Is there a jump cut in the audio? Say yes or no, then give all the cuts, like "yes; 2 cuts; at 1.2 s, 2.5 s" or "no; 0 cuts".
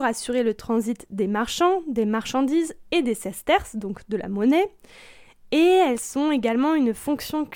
no; 0 cuts